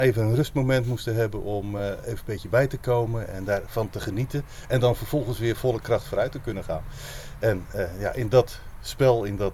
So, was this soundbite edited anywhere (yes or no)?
no